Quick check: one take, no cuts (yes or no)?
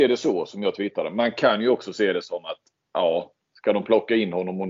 yes